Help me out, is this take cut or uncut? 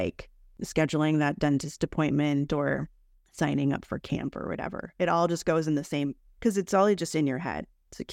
uncut